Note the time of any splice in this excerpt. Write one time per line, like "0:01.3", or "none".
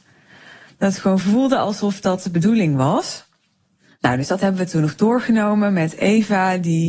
none